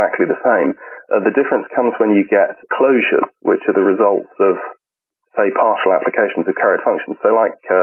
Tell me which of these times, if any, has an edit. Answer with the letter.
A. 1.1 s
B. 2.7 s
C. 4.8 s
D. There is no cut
B